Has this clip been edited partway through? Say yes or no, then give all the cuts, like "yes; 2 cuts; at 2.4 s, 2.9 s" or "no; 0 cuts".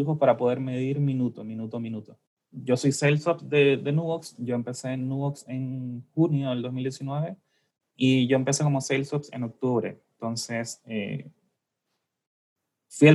no; 0 cuts